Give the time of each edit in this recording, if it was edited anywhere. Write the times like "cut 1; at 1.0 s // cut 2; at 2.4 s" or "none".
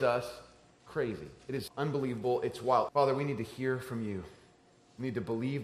cut 1; at 1.7 s // cut 2; at 2.9 s

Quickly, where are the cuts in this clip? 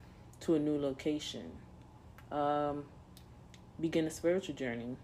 none

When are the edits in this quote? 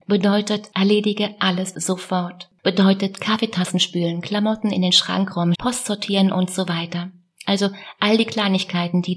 cut 1; at 1.7 s // cut 2; at 5.5 s

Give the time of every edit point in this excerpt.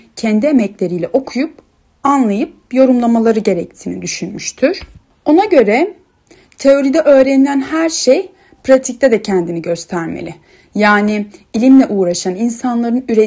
none

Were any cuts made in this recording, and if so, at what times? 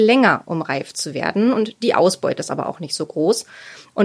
none

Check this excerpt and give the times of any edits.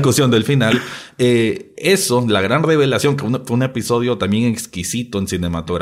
none

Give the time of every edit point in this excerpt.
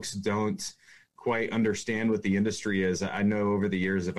none

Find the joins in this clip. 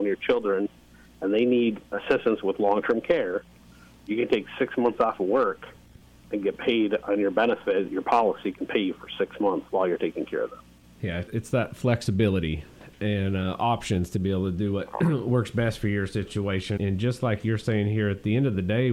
cut 1; at 16.8 s

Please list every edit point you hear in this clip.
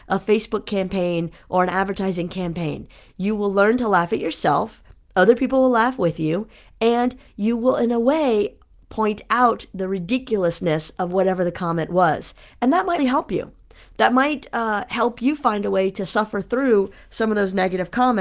cut 1; at 13.0 s

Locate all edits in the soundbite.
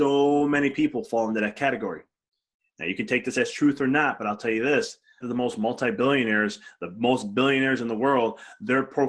cut 1; at 5.2 s

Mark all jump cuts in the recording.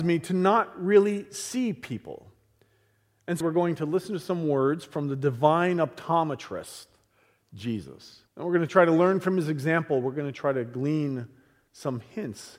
cut 1; at 3.4 s // cut 2; at 8.3 s

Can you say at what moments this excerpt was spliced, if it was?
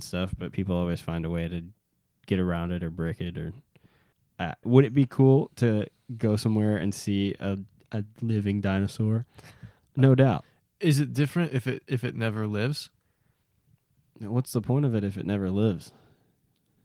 cut 1; at 4.6 s

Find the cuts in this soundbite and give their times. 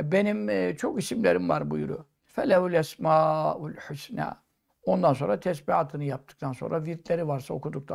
cut 1; at 2.3 s // cut 2; at 4.7 s

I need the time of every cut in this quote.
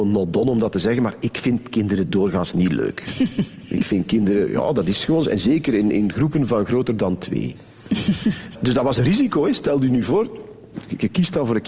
none

